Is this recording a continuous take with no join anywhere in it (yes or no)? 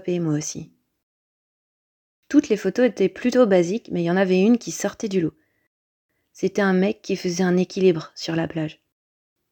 yes